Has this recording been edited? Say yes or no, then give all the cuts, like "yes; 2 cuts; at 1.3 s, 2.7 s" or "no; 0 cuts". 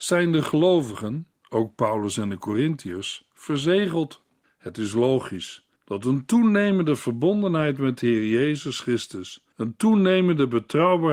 yes; 3 cuts; at 4.4 s, 5.8 s, 9.5 s